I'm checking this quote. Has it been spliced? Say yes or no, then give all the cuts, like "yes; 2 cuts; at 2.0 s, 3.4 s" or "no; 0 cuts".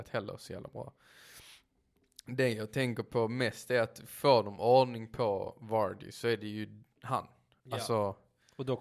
no; 0 cuts